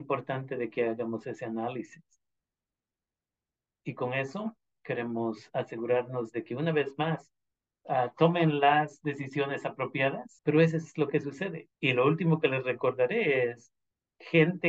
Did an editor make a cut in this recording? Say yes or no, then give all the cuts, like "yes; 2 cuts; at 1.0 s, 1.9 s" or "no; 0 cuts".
yes; 2 cuts; at 10.4 s, 11.7 s